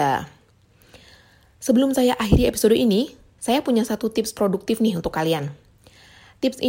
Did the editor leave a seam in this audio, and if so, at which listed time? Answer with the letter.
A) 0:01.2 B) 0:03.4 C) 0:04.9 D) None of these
B